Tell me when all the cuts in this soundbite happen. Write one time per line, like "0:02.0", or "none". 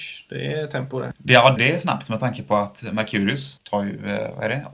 0:01.6
0:03.6